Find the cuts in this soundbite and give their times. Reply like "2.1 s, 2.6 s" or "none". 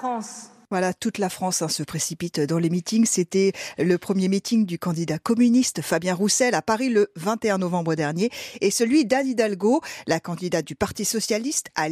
none